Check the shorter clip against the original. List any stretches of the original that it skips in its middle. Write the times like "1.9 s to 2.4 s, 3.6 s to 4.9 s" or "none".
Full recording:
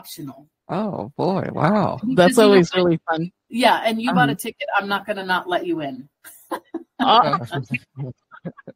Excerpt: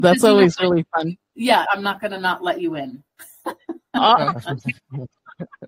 3.8 s to 4.7 s